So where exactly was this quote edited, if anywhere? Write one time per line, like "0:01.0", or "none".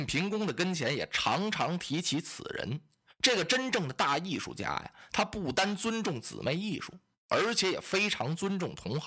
none